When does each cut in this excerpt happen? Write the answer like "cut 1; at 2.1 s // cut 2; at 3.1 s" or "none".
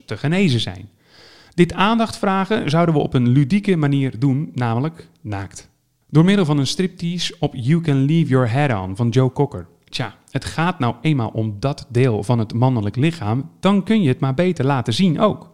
none